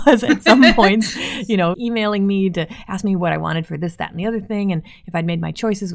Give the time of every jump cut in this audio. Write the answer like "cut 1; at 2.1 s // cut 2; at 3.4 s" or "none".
cut 1; at 1.7 s